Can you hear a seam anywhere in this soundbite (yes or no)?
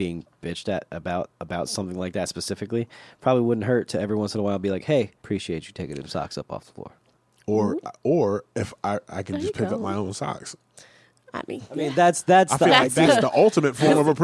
yes